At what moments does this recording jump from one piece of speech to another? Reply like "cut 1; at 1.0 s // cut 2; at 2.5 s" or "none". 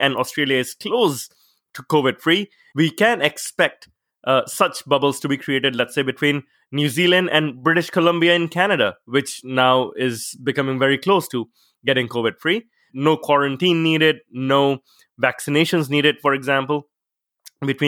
cut 1; at 2.7 s // cut 2; at 12.9 s